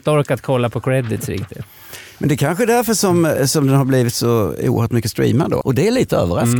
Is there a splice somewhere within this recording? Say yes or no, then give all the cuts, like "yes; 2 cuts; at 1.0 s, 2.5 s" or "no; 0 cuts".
yes; 1 cut; at 5.6 s